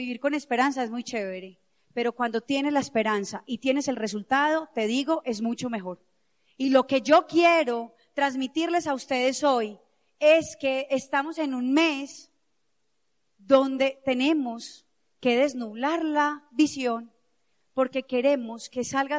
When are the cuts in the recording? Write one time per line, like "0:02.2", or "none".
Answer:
0:17.5